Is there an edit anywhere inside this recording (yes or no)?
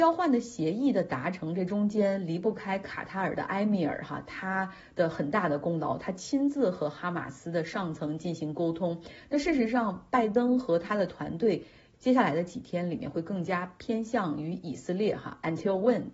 yes